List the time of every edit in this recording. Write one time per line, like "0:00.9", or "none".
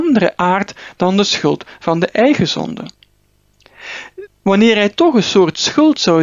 0:04.3